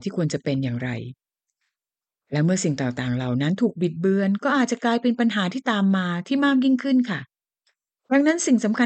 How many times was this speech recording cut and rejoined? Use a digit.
0